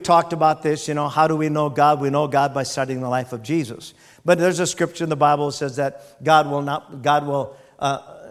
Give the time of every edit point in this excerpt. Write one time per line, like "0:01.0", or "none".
none